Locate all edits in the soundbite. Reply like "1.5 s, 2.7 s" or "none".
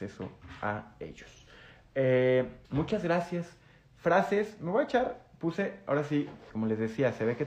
2.6 s, 6.5 s